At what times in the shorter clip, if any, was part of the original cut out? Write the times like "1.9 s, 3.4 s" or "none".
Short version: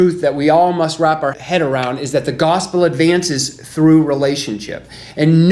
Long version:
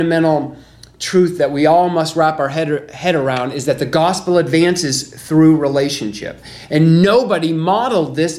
1.3 s